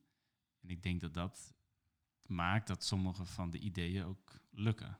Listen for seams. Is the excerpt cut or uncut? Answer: uncut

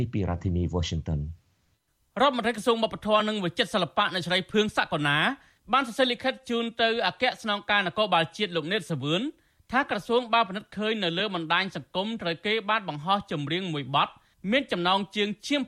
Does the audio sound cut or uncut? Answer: uncut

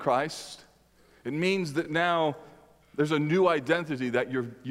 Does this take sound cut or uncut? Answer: uncut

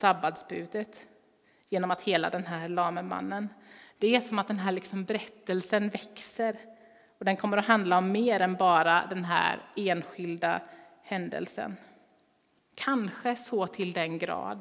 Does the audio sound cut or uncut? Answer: cut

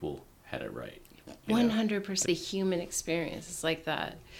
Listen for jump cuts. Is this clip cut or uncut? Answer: cut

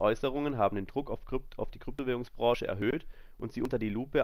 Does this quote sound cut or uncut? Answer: uncut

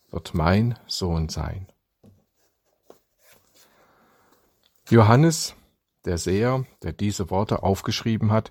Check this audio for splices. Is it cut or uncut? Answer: uncut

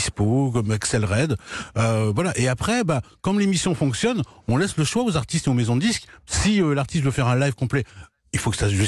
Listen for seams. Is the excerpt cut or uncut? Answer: uncut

